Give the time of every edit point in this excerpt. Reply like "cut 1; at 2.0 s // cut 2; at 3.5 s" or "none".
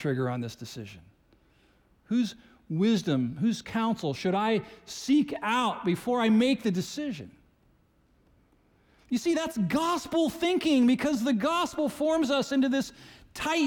none